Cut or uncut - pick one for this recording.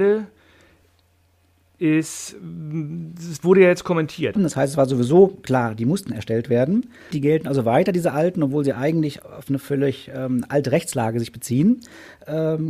cut